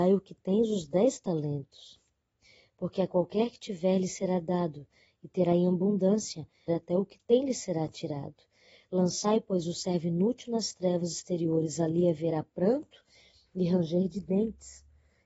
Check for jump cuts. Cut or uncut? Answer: cut